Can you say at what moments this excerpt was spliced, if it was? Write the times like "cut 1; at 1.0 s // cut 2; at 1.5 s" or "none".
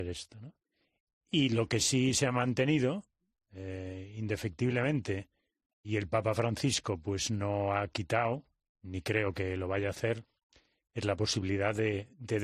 cut 1; at 5.8 s